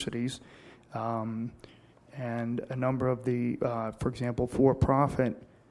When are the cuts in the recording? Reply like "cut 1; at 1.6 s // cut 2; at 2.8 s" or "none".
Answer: none